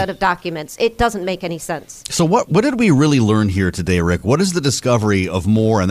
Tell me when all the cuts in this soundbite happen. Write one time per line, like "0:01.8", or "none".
none